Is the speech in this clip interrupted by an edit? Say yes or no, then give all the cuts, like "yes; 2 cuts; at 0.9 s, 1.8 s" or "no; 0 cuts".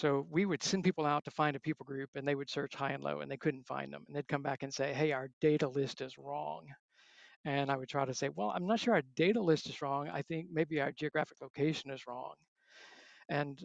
no; 0 cuts